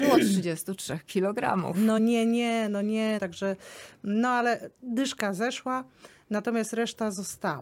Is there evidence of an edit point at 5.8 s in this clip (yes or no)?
no